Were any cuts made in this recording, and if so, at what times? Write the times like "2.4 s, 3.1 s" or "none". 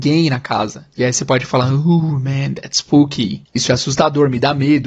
none